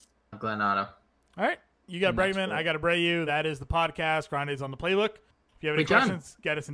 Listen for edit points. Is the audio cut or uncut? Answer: uncut